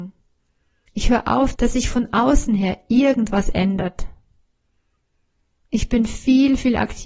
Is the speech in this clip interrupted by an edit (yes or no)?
yes